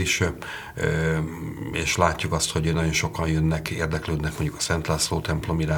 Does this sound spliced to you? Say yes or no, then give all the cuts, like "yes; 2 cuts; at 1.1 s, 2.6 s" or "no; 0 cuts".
no; 0 cuts